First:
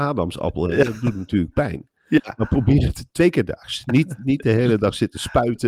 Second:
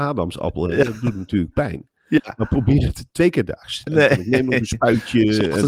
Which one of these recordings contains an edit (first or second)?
second